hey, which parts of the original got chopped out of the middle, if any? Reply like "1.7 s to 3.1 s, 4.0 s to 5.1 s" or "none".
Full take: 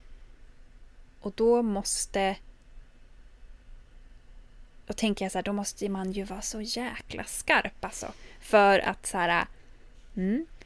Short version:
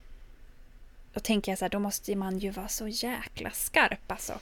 1.1 s to 4.8 s